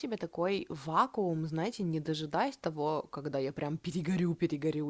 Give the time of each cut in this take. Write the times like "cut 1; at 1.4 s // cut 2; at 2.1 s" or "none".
none